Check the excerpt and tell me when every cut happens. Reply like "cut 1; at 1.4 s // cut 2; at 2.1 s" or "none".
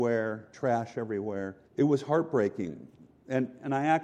cut 1; at 1.6 s